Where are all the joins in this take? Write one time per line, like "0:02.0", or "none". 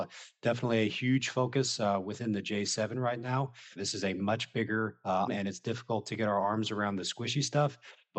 0:03.8
0:05.3